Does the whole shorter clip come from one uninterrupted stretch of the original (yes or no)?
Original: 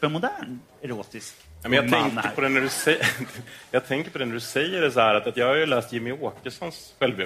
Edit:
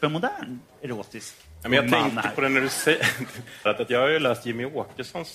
no